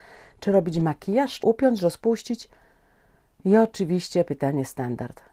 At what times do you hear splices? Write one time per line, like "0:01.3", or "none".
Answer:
0:01.4